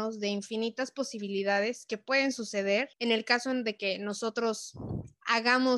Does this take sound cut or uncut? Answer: cut